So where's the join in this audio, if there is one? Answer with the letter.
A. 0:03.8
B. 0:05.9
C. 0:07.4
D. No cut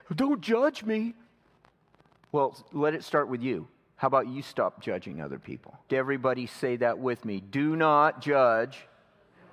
B